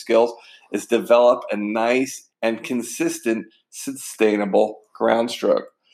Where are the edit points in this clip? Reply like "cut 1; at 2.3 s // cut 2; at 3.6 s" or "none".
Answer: cut 1; at 2.3 s

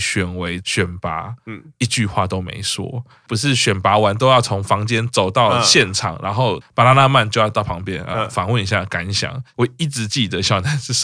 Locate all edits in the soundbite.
none

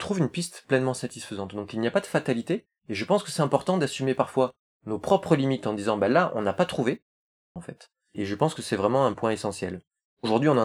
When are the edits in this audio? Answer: cut 1; at 7.6 s

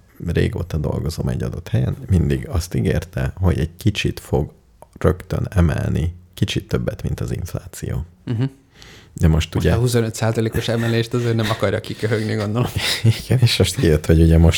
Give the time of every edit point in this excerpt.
none

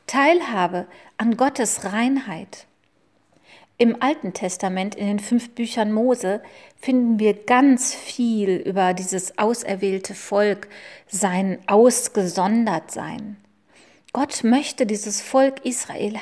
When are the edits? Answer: none

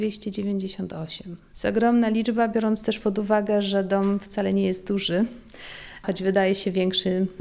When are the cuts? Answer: cut 1; at 1.5 s

